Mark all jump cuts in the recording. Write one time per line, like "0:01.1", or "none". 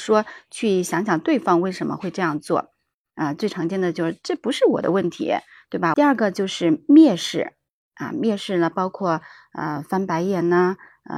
0:05.9